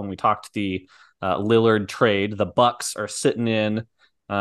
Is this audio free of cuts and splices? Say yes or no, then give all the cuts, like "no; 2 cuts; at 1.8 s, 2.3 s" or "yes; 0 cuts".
yes; 0 cuts